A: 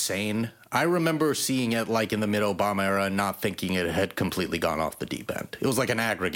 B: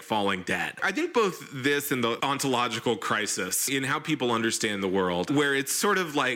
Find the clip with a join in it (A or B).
B